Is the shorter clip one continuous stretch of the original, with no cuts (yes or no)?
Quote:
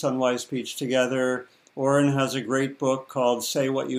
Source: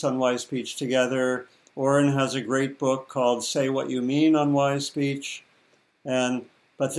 yes